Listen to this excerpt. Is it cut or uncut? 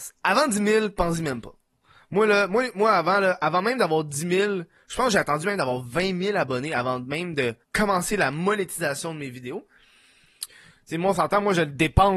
cut